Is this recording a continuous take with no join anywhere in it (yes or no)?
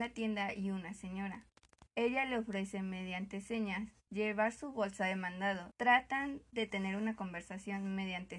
no